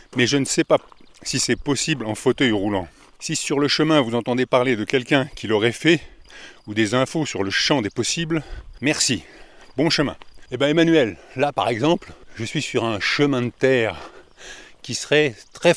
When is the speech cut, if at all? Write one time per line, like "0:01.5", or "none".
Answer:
none